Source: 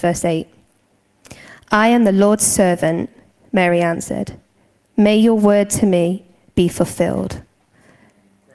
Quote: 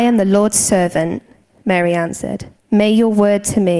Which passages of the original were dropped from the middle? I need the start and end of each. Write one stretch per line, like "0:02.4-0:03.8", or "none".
0:04.4-0:04.8